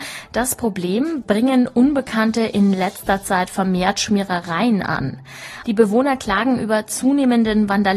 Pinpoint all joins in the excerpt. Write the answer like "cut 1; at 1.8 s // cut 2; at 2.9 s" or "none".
cut 1; at 1.2 s // cut 2; at 5.6 s